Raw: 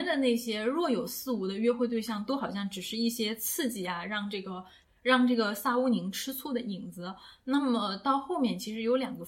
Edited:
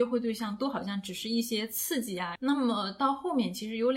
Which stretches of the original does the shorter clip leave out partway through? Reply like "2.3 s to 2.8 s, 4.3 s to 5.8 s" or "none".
4.0 s to 7.4 s